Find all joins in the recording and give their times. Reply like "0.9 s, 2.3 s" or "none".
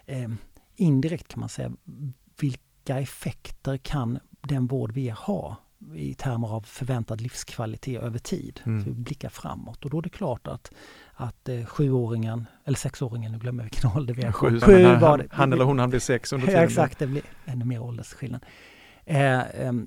14.6 s